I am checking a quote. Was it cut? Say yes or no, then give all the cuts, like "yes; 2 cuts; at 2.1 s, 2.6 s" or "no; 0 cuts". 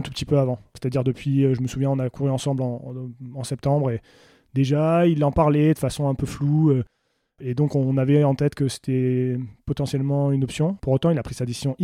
no; 0 cuts